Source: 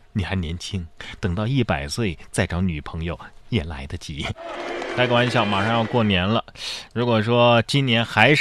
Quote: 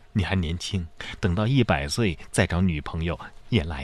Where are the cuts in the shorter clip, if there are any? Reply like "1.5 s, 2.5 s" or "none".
none